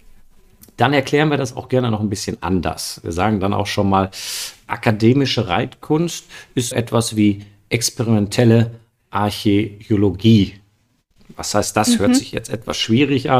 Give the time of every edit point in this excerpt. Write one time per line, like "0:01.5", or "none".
0:06.7